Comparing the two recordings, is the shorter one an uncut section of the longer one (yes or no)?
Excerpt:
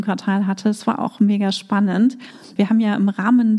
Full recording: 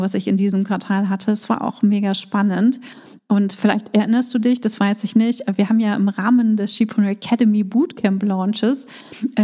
no